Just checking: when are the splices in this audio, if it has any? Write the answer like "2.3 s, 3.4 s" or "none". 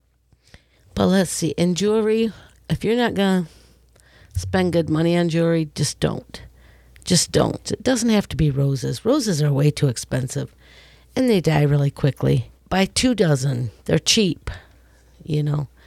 7.6 s, 12.6 s, 13.8 s